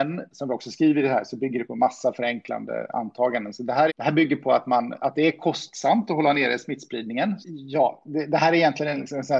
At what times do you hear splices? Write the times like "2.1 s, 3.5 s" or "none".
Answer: 3.9 s, 7.4 s